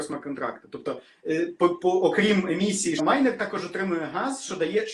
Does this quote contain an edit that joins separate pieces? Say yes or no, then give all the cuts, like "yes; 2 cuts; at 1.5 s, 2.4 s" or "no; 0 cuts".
yes; 1 cut; at 3.0 s